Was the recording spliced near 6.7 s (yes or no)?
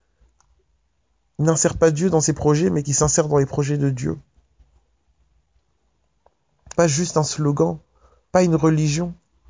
yes